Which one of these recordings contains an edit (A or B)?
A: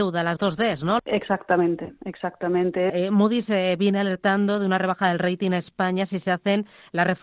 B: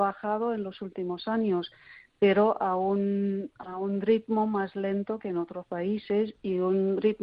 A